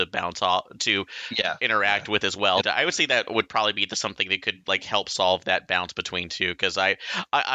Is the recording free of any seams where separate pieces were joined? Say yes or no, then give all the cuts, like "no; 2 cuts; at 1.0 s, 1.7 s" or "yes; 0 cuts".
no; 1 cut; at 2.6 s